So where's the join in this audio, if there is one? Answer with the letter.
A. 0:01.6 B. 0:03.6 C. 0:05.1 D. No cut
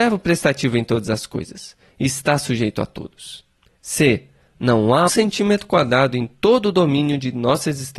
C